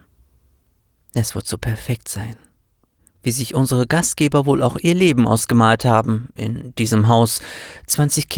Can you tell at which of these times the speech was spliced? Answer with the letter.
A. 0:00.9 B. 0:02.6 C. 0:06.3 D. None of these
D